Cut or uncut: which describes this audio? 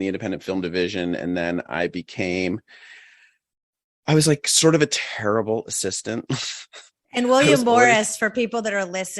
uncut